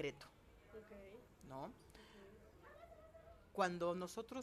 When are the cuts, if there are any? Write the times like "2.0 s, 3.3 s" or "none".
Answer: none